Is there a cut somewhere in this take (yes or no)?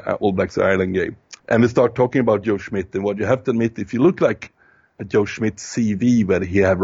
yes